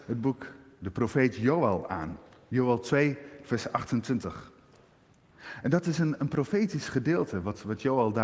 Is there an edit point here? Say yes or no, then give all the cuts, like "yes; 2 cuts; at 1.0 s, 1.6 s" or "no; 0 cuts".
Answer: no; 0 cuts